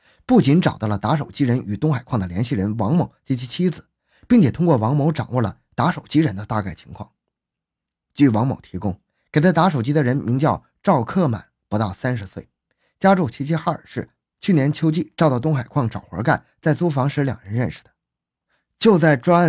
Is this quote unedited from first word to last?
yes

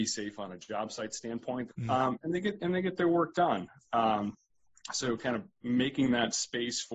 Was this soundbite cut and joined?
yes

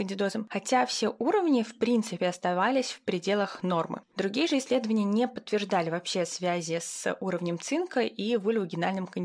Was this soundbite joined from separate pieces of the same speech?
no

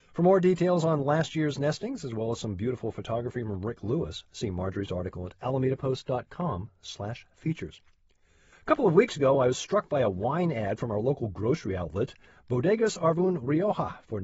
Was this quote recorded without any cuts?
yes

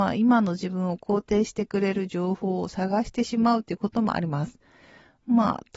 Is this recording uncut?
yes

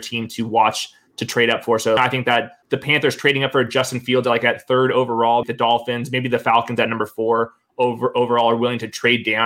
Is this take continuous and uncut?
no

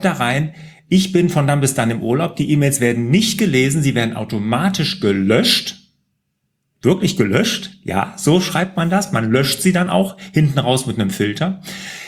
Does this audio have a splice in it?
no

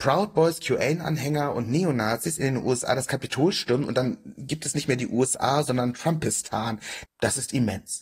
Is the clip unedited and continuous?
no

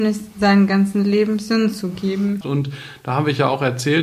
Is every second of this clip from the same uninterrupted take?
no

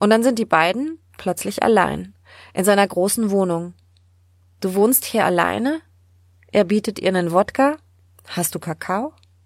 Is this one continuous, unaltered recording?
no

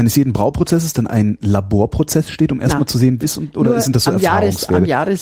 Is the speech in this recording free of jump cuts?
no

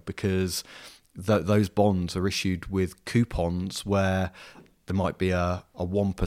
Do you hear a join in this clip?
no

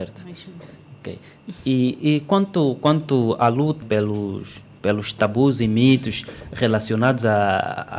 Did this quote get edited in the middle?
yes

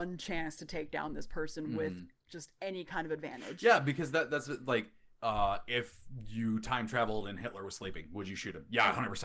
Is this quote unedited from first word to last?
yes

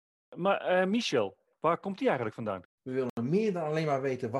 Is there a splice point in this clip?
yes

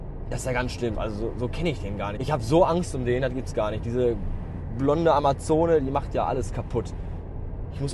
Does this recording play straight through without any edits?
no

